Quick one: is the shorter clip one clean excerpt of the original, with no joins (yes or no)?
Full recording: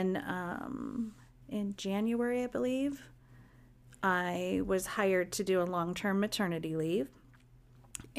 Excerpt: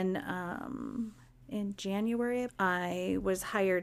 no